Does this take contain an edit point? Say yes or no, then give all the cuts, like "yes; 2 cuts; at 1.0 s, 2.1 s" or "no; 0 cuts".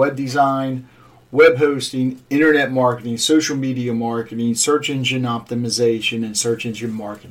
no; 0 cuts